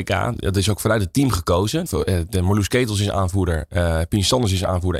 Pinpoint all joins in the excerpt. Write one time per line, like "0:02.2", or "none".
0:01.9